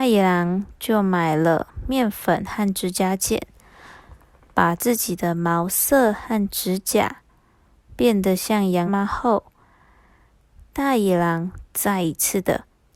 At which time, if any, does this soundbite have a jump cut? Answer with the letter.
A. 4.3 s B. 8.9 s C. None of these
B